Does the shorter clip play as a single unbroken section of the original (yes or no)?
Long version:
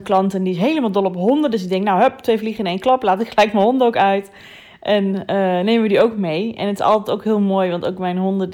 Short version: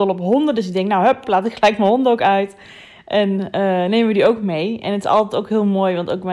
no